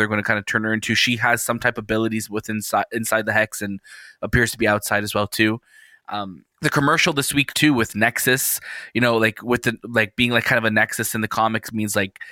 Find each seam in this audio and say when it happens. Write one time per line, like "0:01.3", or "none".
0:06.5